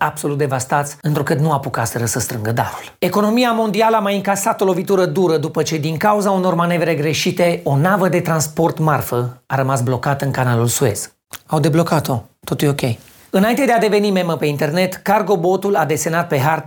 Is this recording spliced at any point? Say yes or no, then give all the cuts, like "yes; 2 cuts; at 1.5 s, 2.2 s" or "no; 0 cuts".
yes; 1 cut; at 11.5 s